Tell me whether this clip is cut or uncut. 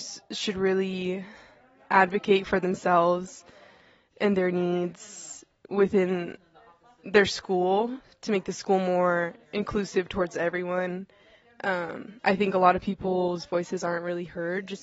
uncut